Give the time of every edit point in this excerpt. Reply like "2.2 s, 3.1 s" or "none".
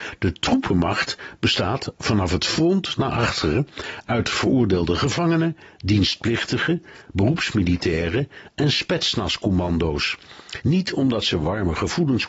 10.6 s